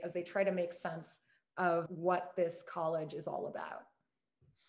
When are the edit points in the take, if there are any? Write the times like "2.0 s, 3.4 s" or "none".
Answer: 1.9 s